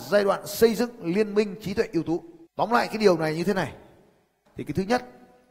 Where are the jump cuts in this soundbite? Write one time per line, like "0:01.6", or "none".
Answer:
0:02.5